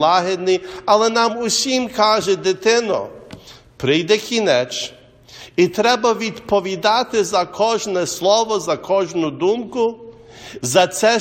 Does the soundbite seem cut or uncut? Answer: uncut